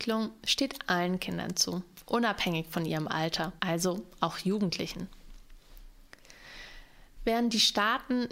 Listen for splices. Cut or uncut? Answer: cut